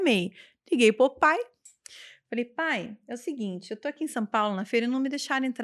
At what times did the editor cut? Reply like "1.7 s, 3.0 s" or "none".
none